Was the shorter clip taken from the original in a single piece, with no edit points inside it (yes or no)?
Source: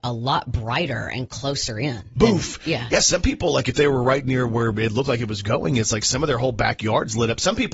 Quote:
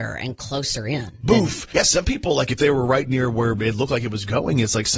no